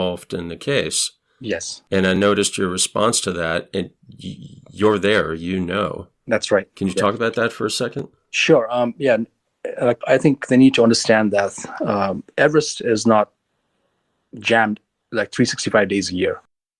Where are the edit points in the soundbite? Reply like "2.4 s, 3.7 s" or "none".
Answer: 10.0 s